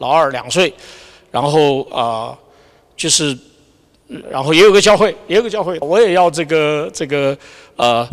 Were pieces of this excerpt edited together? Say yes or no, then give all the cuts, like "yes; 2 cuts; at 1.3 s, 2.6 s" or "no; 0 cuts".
yes; 2 cuts; at 4.2 s, 5.8 s